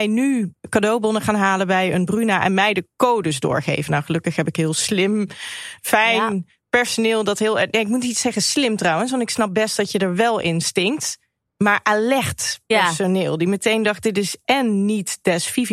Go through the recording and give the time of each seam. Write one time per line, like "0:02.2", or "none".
none